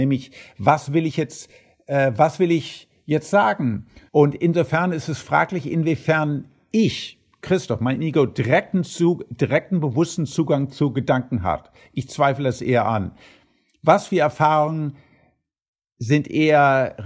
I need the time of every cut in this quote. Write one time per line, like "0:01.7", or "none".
0:04.1